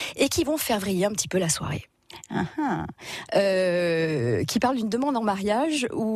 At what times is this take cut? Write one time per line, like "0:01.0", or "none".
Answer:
0:03.3